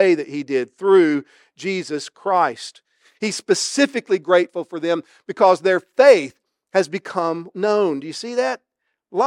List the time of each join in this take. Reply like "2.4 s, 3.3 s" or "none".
7.5 s